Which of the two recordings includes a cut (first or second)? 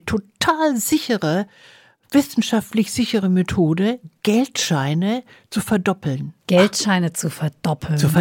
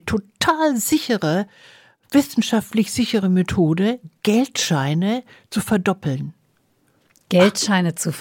first